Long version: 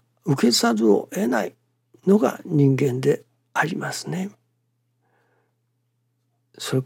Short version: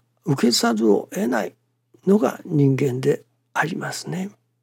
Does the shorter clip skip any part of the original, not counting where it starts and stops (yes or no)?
no